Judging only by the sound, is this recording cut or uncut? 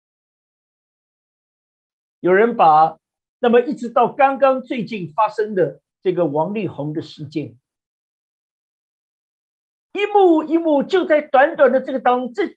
cut